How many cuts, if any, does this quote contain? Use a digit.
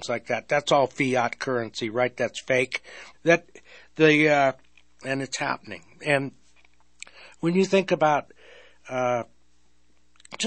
2